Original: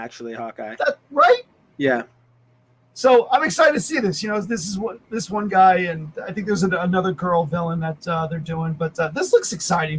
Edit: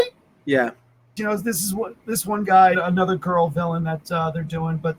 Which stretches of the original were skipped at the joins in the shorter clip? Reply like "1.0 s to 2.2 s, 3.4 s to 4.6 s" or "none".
2.5 s to 4.2 s, 5.8 s to 6.7 s